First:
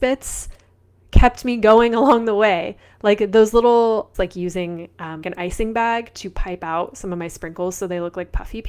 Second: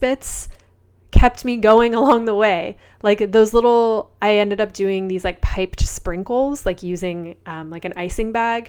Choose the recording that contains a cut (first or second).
first